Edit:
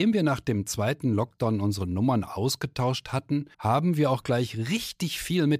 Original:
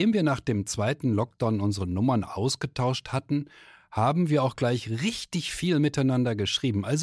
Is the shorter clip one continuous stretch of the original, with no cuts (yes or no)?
no